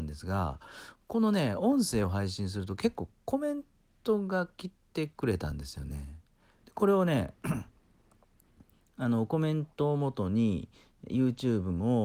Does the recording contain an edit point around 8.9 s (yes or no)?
no